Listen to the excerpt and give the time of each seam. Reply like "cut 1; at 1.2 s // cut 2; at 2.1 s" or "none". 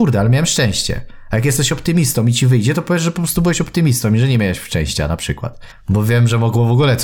cut 1; at 5.7 s